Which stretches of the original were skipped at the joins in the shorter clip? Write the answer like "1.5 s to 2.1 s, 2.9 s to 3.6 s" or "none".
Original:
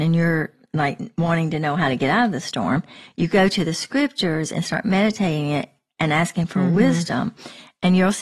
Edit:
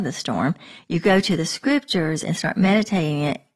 none